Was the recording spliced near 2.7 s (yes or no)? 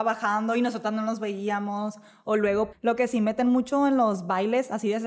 yes